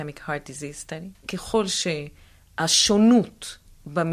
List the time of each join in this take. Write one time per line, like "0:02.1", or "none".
0:01.2